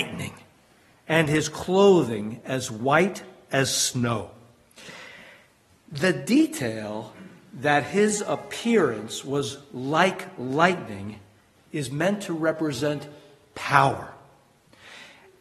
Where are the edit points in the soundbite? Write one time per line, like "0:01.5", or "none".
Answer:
none